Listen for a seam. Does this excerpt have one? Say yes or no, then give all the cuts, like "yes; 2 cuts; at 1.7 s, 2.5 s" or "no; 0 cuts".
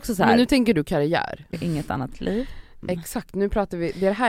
yes; 2 cuts; at 1.5 s, 2.8 s